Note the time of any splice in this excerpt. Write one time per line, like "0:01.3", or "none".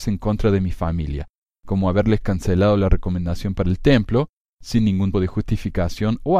0:05.1